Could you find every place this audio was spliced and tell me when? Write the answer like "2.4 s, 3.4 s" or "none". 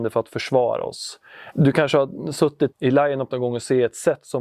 1.5 s, 2.7 s